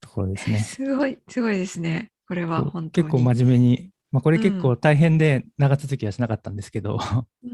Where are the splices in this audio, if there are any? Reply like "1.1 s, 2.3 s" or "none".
none